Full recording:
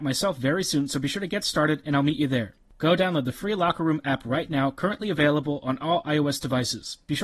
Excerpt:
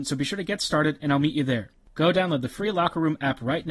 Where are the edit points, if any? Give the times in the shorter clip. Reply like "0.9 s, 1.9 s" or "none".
none